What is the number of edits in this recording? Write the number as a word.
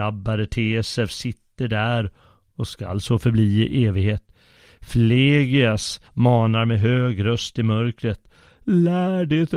one